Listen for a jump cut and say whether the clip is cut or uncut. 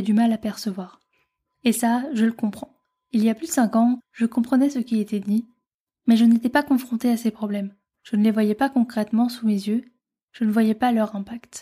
cut